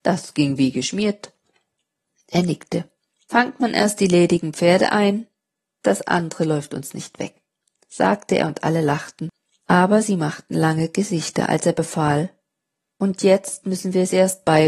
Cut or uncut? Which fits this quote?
uncut